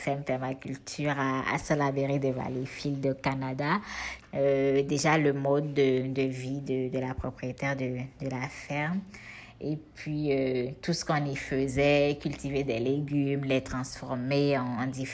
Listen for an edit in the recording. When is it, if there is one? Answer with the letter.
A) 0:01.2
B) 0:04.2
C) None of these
B